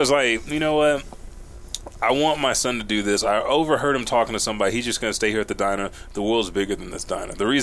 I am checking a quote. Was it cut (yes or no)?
no